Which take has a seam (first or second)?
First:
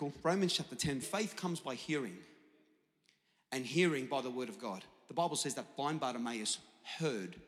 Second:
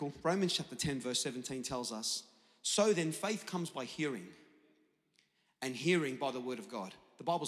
first